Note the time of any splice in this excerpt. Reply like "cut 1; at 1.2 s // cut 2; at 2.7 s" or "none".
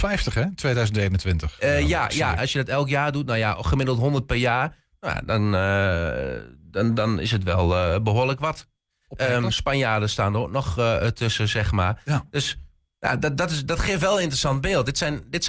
cut 1; at 2.4 s